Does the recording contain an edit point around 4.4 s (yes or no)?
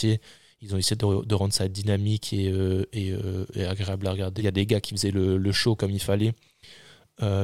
yes